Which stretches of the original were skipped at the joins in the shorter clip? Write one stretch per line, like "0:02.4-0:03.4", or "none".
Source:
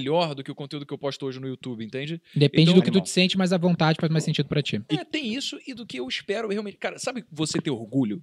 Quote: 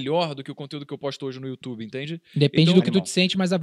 none